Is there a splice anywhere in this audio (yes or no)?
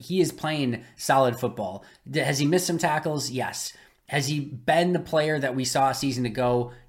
no